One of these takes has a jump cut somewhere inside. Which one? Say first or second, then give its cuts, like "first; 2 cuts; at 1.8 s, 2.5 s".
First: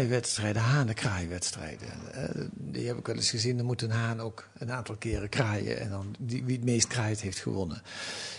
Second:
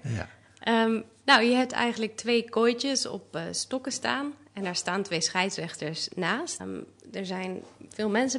second; 1 cut; at 6.6 s